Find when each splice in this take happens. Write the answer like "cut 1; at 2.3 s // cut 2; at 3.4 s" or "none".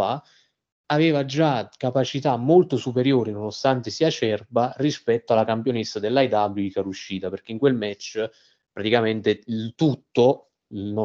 none